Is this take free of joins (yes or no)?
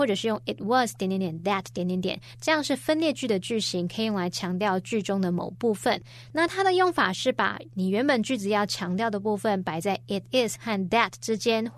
yes